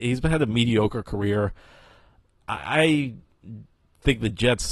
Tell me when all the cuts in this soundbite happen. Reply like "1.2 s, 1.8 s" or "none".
none